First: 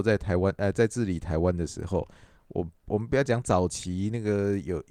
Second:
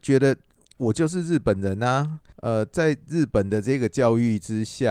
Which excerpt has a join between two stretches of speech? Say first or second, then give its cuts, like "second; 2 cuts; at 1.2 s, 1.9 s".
second; 1 cut; at 2.3 s